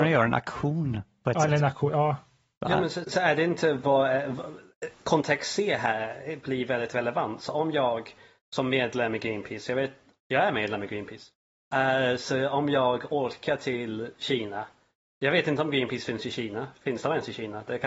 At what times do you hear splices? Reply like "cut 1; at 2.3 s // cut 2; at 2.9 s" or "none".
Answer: cut 1; at 3.0 s